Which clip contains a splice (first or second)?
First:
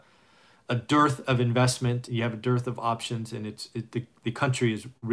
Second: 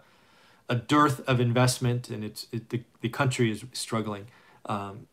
second